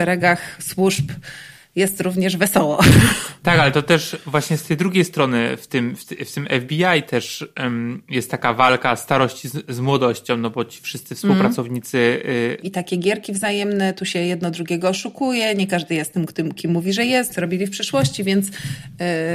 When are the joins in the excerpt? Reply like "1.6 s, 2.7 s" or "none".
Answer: 12.6 s, 17.3 s